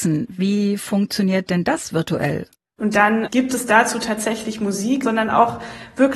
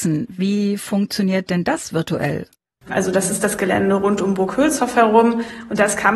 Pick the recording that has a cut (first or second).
first